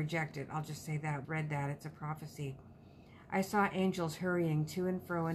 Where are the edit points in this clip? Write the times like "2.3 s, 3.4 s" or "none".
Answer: 1.2 s

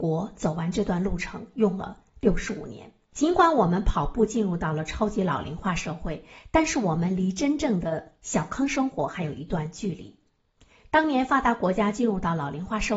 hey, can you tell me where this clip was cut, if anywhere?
none

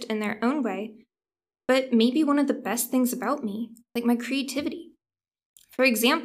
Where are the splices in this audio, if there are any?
none

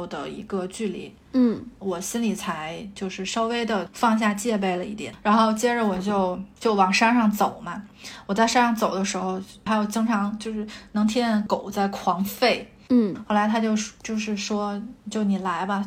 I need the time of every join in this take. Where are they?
12.9 s

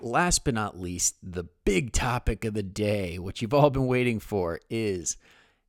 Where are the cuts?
none

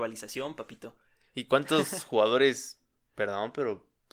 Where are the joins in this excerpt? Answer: none

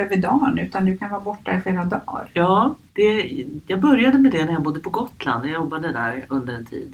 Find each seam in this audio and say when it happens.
none

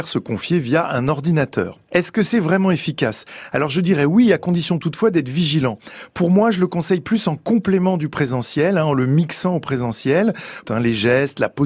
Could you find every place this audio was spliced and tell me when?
10.6 s

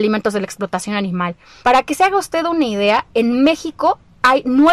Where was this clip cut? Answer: 1.6 s

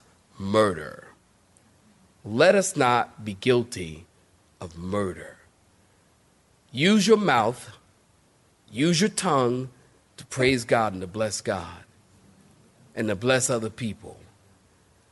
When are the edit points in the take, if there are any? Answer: none

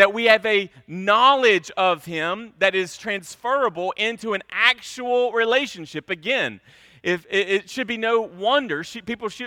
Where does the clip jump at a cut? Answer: none

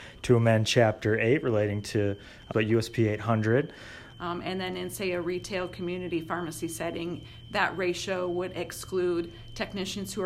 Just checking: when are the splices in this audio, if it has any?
2.5 s, 4.1 s

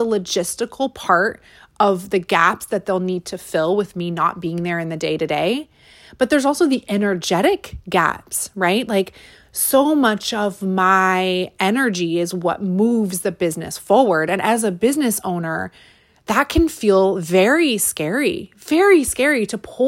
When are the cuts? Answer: none

